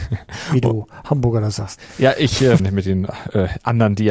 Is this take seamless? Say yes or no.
no